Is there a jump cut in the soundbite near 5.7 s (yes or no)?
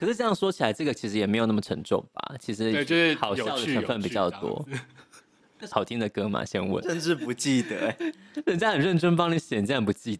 yes